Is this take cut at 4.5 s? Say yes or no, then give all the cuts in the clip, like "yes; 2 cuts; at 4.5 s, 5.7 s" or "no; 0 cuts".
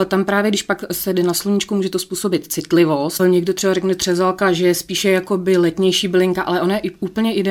no; 1 cut; at 3.2 s